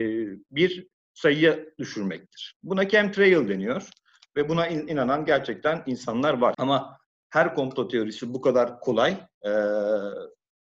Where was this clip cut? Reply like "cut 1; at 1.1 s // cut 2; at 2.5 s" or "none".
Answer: cut 1; at 2.5 s // cut 2; at 6.5 s // cut 3; at 9.3 s